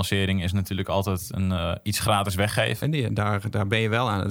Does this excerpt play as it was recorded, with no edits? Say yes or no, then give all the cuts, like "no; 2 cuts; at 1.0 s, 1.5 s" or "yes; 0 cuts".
no; 1 cut; at 2.8 s